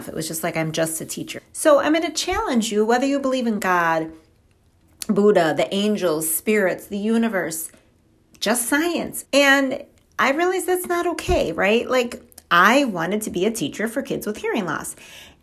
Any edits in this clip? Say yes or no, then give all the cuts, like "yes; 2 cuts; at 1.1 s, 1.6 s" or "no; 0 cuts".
yes; 2 cuts; at 1.4 s, 9.2 s